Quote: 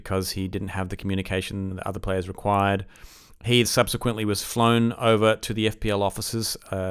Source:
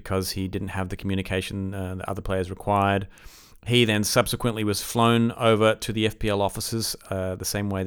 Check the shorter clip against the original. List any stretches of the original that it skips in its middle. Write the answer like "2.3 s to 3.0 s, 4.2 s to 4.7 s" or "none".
1.7 s to 1.9 s, 3.9 s to 4.0 s